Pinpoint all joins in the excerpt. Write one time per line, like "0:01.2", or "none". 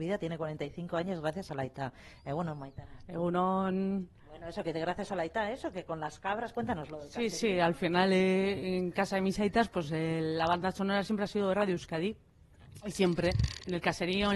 none